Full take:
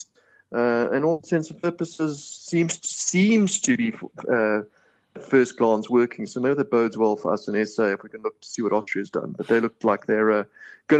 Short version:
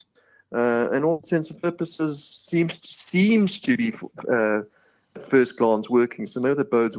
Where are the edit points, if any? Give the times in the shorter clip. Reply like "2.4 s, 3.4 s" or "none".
none